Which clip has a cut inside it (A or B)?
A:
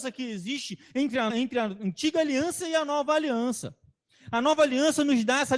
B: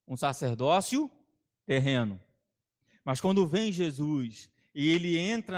A